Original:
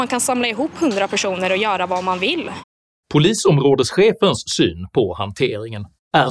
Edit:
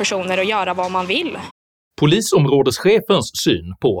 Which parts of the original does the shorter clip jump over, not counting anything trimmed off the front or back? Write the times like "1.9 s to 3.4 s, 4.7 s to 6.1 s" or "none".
none